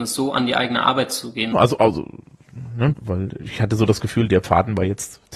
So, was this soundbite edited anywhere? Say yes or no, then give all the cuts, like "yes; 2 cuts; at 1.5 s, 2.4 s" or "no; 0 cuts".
yes; 2 cuts; at 1.5 s, 2.9 s